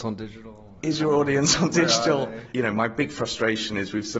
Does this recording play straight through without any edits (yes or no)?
no